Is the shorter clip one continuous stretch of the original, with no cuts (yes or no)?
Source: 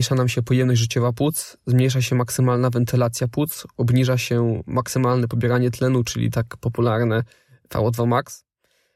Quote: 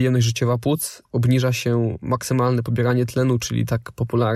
no